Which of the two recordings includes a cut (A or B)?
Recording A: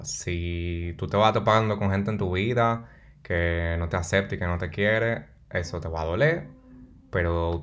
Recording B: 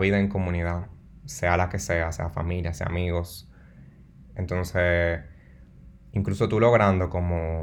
B